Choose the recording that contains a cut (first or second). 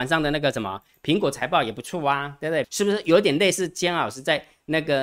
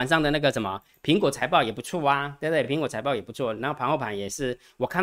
first